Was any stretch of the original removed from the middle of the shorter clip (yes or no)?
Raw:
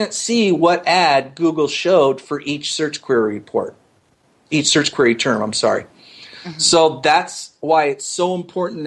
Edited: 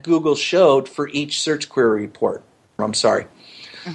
yes